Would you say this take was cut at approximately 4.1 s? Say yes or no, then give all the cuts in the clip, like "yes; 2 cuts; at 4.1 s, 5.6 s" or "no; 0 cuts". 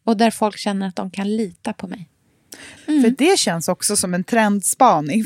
no; 1 cut; at 2.8 s